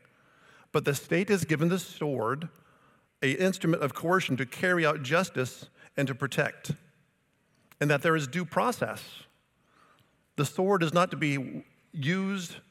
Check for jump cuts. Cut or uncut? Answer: uncut